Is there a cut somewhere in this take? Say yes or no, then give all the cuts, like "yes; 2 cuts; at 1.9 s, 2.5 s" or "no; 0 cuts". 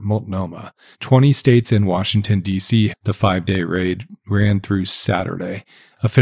yes; 2 cuts; at 0.9 s, 2.9 s